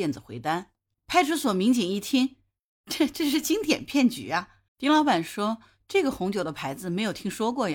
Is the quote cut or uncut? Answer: cut